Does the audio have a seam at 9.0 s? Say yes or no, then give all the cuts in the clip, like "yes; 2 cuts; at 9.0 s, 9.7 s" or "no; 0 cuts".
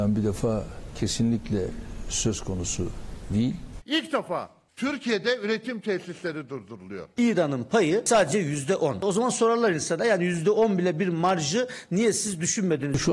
no; 2 cuts; at 3.8 s, 7.2 s